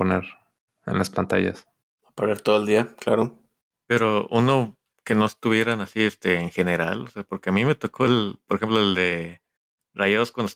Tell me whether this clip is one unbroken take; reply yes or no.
no